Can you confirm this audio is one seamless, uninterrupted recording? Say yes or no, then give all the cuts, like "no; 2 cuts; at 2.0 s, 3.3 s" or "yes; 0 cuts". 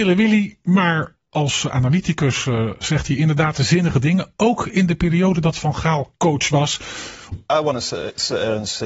no; 1 cut; at 7.3 s